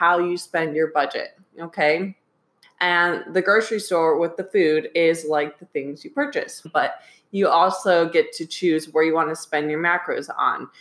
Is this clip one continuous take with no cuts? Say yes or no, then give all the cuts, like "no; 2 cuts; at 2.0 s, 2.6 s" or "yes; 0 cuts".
no; 2 cuts; at 2.6 s, 6.6 s